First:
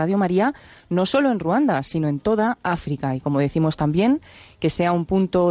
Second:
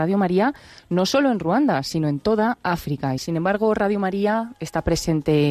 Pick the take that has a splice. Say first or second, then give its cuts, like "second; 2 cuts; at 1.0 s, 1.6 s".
second; 1 cut; at 3.2 s